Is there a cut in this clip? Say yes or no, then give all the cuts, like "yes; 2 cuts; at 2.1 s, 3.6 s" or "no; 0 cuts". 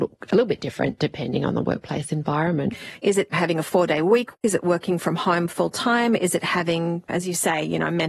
yes; 1 cut; at 3.0 s